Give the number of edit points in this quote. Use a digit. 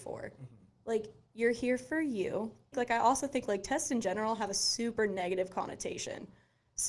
1